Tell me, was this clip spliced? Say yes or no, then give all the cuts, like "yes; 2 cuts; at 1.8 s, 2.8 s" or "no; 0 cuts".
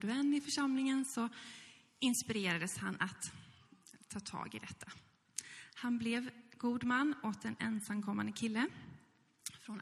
no; 0 cuts